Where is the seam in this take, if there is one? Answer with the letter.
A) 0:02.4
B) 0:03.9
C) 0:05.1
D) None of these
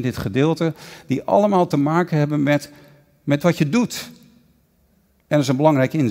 D